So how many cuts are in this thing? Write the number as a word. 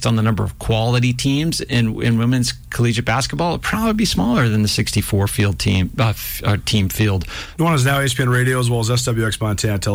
one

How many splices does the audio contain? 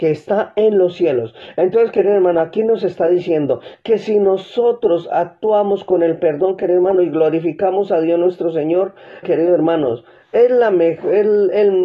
one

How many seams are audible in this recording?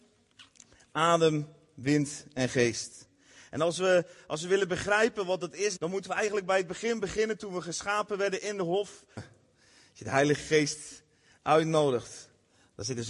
two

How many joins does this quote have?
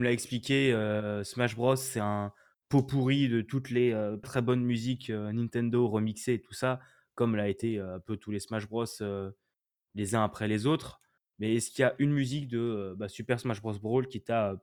one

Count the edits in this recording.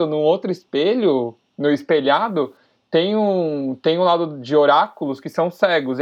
zero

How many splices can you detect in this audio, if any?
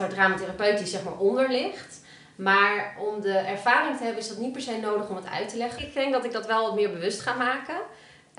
one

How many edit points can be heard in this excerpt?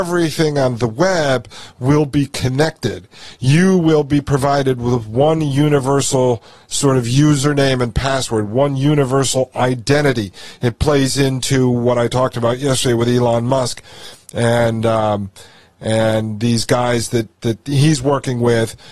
zero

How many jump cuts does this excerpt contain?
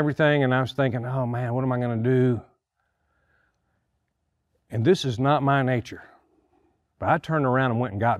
zero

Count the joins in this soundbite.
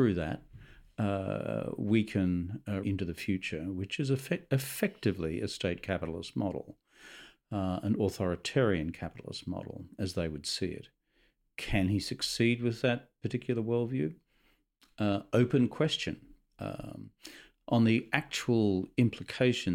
one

